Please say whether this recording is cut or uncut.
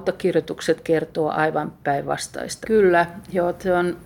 cut